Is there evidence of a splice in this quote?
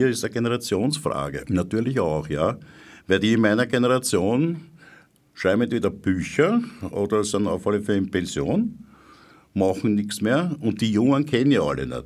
no; 0 cuts

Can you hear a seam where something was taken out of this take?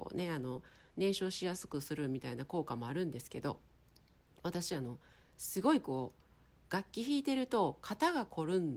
no; 0 cuts

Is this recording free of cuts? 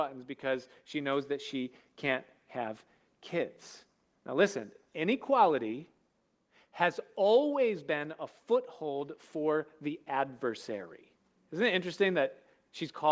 yes; 0 cuts

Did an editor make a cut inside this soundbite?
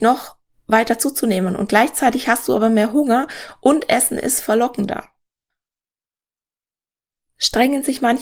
no; 0 cuts

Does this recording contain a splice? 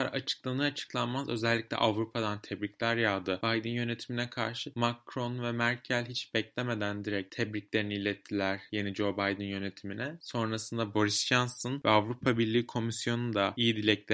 no; 0 cuts

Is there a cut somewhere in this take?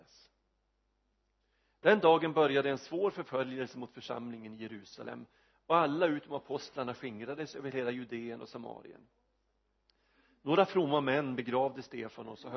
no; 0 cuts

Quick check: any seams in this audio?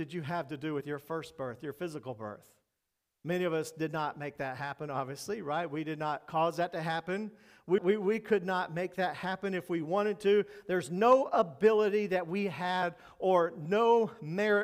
yes; 1 cut; at 7.8 s

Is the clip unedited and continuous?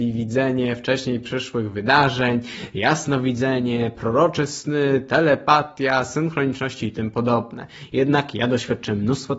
yes; 0 cuts

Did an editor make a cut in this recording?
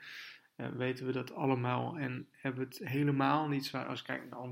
no; 0 cuts

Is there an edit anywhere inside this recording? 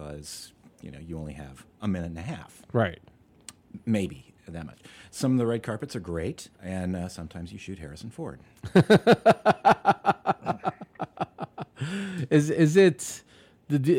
yes; 1 cut; at 6.5 s

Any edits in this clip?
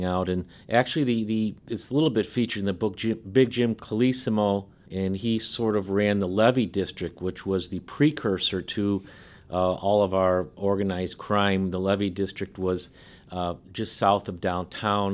no; 0 cuts

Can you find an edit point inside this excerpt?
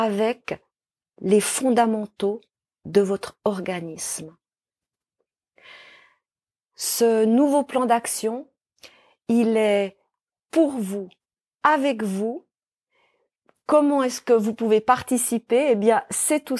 no; 0 cuts

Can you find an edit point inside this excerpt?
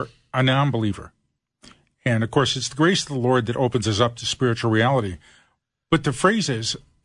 no; 0 cuts

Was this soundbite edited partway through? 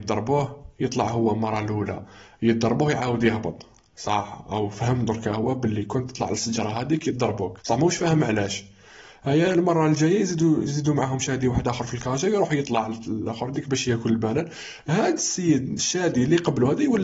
yes; 1 cut; at 7.6 s

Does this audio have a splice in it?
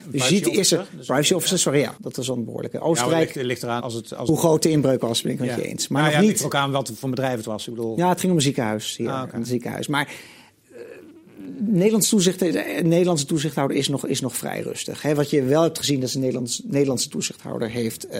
yes; 2 cuts; at 2.0 s, 3.8 s

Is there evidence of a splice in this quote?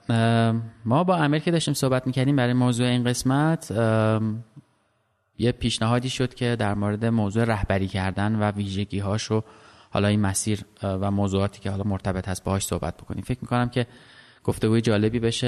no; 0 cuts

